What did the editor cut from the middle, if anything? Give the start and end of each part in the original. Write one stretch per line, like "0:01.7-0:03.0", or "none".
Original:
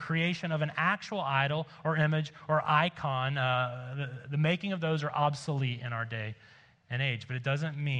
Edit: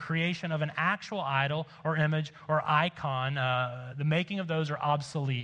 0:03.9-0:04.2